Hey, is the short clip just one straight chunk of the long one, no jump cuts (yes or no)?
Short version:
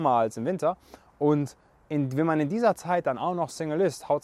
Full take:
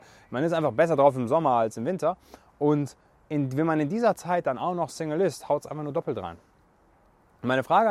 yes